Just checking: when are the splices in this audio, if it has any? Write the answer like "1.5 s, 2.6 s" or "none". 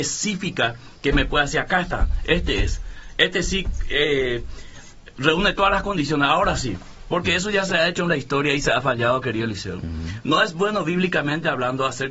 none